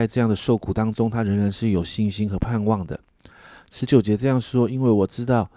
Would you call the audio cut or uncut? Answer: uncut